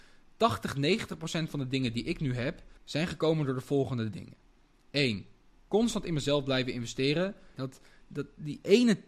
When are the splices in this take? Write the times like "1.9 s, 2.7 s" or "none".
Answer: 2.8 s, 7.5 s